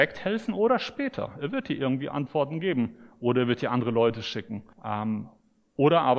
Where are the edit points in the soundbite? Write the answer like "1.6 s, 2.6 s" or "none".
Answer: 4.7 s